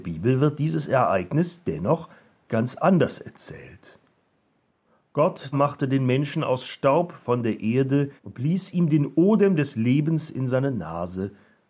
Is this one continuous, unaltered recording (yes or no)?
no